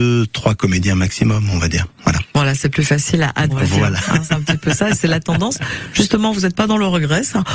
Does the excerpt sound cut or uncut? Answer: cut